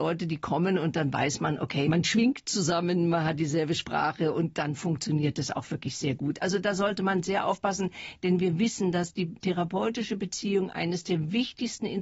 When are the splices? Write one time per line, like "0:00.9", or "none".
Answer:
none